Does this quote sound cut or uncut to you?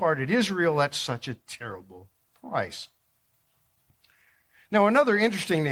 uncut